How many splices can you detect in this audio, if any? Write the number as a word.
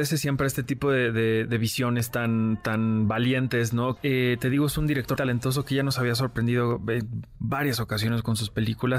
two